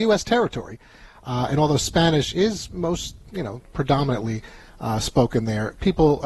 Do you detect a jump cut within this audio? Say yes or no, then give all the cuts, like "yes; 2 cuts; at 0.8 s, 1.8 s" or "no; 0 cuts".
no; 0 cuts